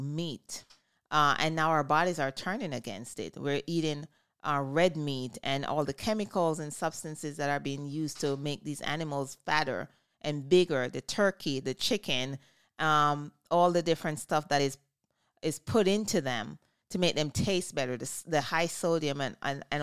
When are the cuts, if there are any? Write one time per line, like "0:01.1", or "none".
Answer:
none